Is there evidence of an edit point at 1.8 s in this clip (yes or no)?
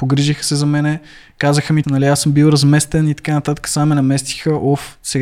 yes